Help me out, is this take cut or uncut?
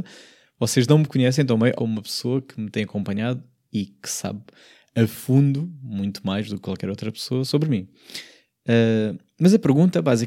cut